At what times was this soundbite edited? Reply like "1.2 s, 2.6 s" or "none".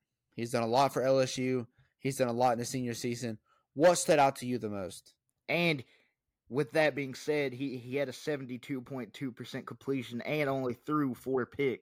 5.3 s